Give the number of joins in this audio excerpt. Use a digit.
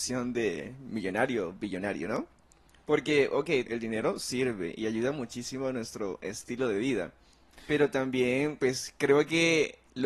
1